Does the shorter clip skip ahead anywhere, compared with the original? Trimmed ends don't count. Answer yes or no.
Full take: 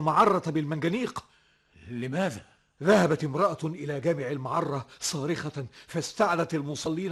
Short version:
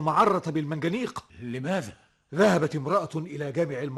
yes